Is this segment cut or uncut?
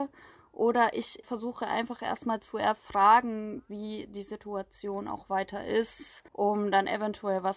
cut